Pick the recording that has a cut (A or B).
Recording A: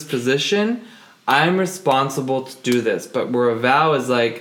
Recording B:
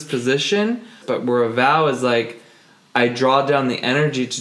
B